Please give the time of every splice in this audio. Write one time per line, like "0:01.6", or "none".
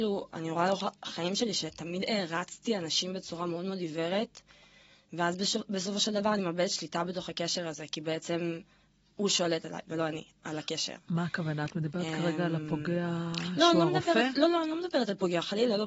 none

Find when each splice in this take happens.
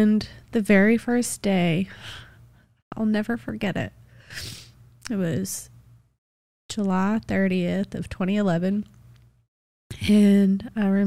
none

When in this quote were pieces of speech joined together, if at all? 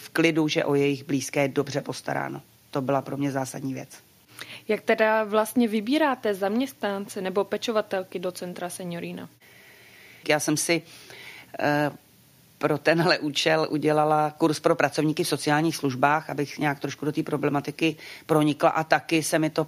0:10.2

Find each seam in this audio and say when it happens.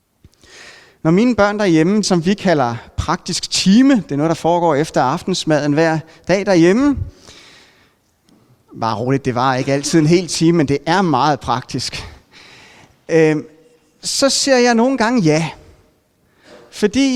0:02.0

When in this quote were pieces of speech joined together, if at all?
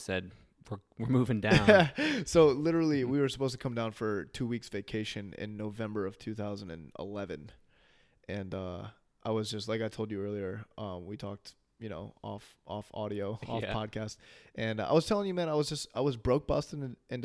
none

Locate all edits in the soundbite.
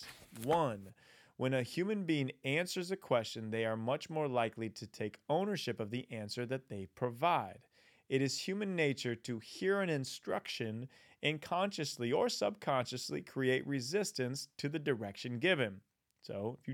none

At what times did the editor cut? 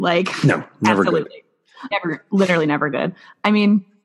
0:01.9

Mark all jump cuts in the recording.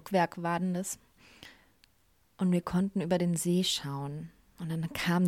none

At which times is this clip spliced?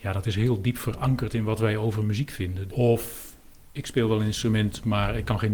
0:02.7

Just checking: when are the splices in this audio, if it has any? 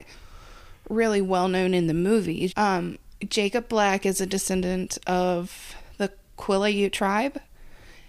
0:02.5

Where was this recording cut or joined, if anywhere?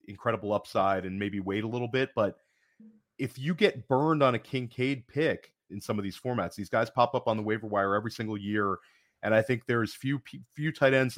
0:05.7

